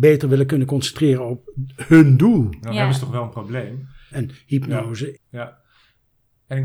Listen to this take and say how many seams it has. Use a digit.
2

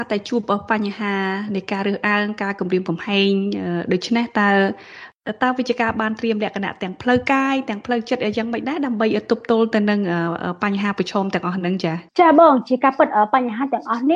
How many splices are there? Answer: 1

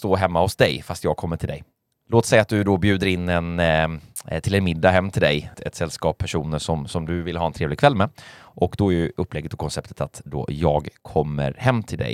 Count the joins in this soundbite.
1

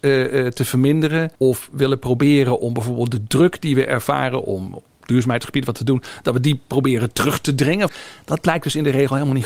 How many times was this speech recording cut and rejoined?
2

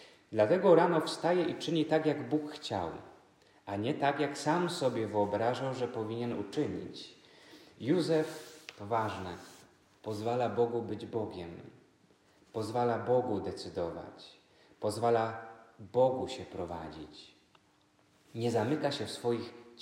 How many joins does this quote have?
0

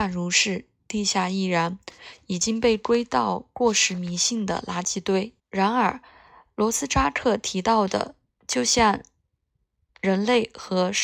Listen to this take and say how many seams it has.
1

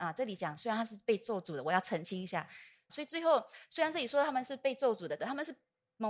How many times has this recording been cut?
2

